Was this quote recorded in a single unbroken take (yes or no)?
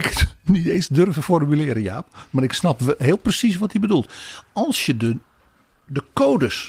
yes